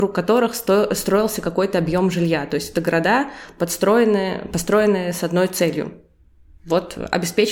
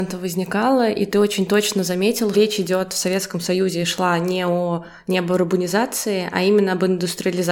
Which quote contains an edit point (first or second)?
second